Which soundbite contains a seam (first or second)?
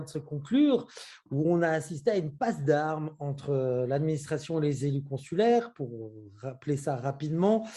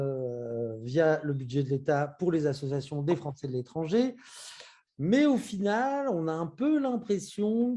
second